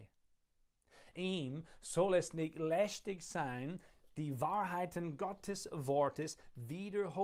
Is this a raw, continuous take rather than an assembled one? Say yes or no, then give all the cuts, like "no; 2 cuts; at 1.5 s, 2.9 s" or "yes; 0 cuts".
no; 1 cut; at 1.1 s